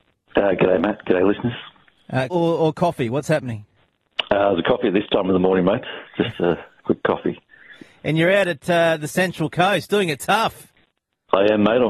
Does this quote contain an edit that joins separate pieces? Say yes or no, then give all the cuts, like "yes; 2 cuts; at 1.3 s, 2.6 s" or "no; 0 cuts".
yes; 1 cut; at 2.3 s